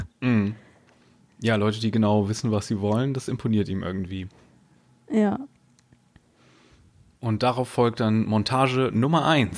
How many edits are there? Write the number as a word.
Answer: zero